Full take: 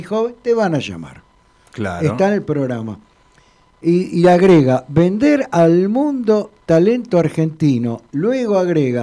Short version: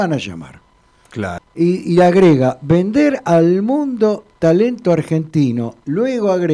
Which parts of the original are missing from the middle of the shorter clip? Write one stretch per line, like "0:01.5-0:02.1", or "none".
0:02.0-0:03.6